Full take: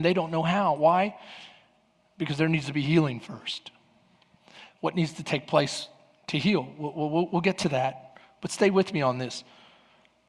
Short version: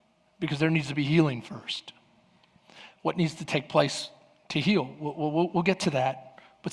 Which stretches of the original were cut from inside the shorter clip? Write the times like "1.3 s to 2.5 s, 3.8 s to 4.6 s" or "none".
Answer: none

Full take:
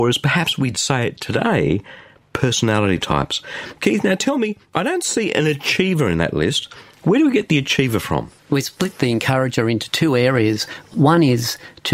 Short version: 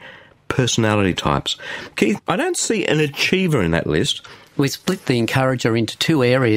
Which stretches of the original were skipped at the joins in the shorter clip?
4.0 s to 4.6 s, 7.0 s to 8.4 s

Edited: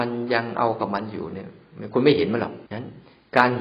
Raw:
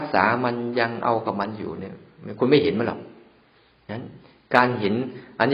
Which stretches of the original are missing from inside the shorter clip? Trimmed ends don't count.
3.1 s to 3.8 s

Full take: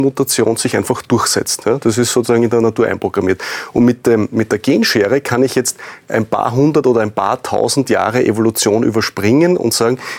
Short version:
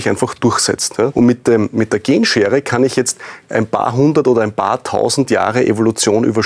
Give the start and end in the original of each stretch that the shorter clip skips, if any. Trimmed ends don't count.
1.8 s to 3.7 s

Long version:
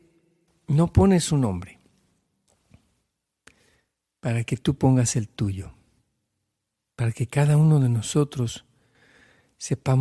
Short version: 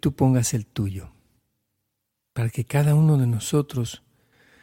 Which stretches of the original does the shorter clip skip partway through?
none

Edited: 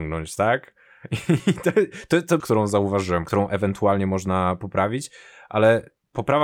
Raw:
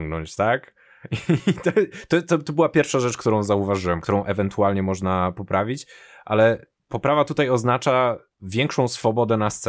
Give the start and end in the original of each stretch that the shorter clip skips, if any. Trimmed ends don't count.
2.4 s to 3.2 s

